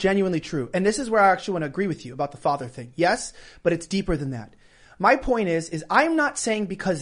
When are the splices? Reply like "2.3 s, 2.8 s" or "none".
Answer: none